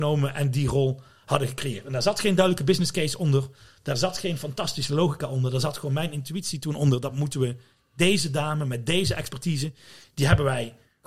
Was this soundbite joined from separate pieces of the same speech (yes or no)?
no